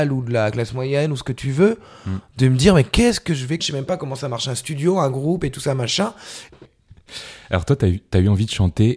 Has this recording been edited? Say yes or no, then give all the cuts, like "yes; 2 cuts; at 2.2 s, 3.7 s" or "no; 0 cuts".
yes; 2 cuts; at 3.6 s, 6.5 s